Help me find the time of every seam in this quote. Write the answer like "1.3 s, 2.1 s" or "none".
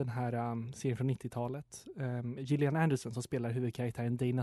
2.4 s